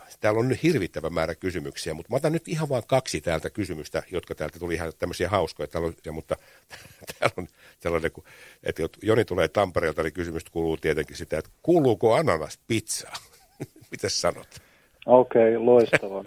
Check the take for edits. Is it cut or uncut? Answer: cut